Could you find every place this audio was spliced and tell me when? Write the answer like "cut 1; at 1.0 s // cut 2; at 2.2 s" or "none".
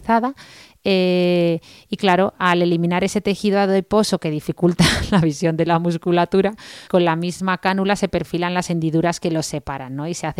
cut 1; at 6.9 s